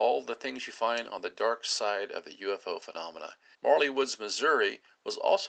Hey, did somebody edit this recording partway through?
yes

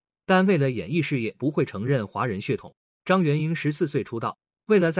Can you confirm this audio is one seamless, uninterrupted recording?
no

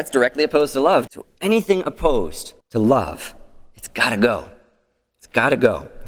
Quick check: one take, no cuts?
no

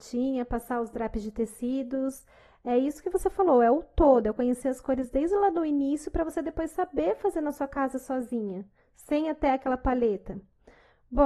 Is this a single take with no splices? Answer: yes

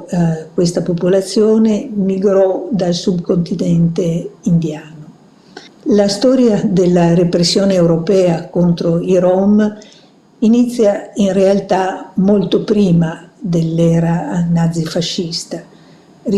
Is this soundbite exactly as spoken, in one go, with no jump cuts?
no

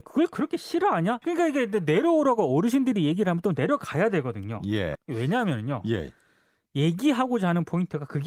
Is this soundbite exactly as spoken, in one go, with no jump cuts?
no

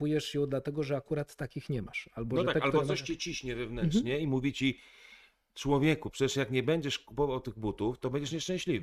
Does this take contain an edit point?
no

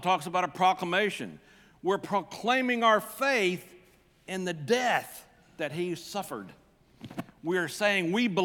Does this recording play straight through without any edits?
yes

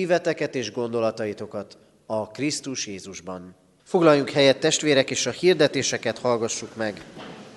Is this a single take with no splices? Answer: no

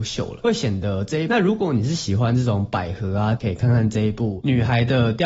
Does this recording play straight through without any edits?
no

